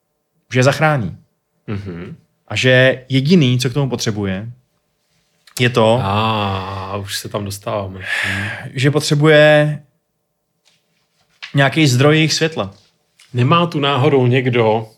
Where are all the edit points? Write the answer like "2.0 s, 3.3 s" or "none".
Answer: none